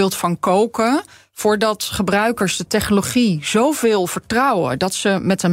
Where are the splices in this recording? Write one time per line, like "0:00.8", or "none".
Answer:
none